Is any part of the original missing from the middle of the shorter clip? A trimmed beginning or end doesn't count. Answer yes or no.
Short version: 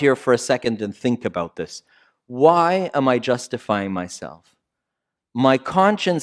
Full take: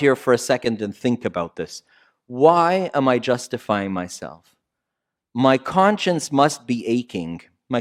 no